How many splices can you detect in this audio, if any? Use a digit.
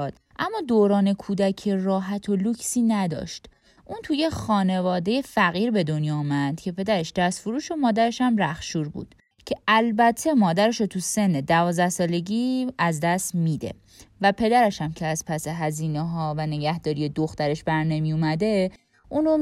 0